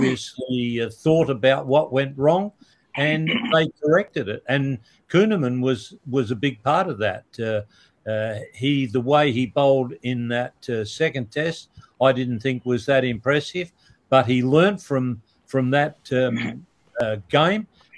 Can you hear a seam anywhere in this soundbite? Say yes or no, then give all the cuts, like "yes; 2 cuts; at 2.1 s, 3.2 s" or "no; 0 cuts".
no; 0 cuts